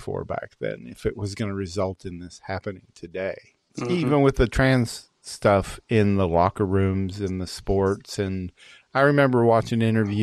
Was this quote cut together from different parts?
no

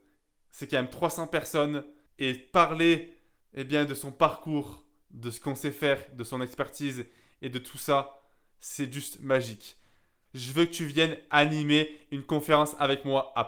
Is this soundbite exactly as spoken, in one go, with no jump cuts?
no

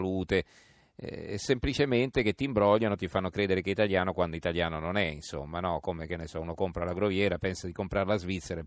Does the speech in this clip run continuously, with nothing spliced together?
yes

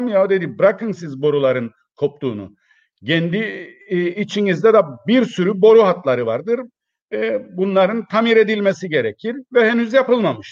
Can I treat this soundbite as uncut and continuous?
yes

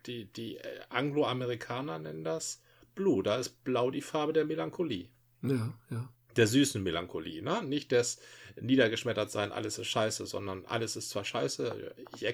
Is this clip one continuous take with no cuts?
yes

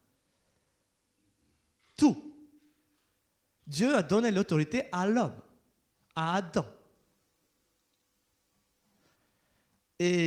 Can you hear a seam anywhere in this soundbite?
no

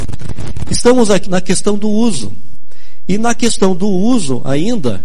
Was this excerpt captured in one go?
no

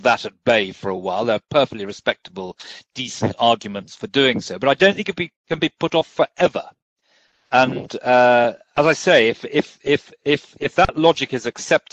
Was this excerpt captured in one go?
yes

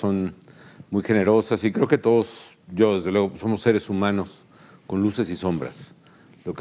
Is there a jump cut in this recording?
no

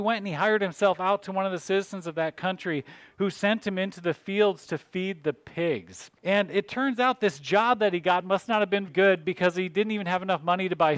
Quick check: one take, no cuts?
no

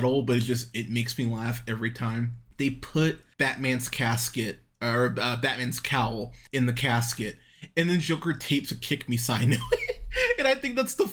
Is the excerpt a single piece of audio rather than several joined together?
yes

